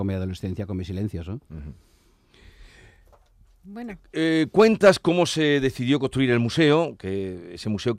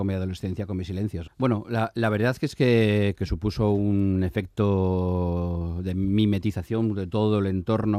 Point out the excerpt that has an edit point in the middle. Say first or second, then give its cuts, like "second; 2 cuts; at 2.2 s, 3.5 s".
second; 2 cuts; at 1.3 s, 3.2 s